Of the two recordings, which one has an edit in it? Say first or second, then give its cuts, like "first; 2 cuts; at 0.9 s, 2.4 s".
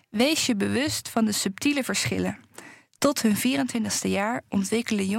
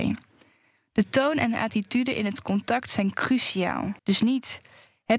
second; 1 cut; at 4.0 s